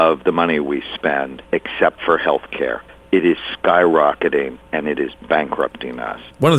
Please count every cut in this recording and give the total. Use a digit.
0